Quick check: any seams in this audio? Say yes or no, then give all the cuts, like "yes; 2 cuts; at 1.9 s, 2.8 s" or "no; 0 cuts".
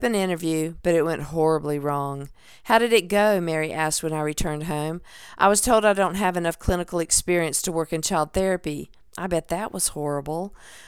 no; 0 cuts